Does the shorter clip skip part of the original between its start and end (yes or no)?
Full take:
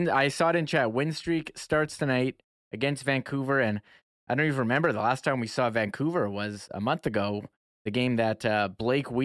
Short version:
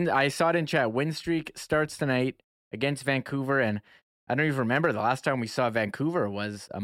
no